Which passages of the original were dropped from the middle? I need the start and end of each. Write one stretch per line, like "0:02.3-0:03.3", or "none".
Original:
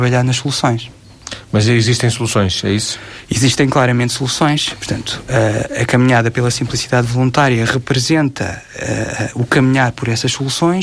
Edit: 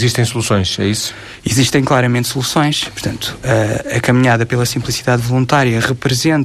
none